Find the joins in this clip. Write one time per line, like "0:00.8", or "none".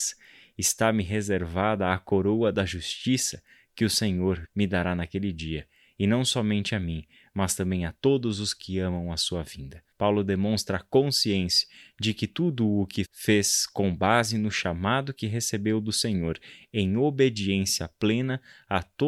0:04.4
0:09.9
0:13.0